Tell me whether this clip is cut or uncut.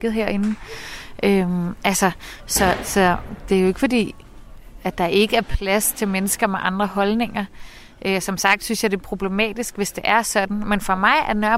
uncut